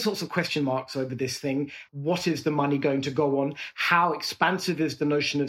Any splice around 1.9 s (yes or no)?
yes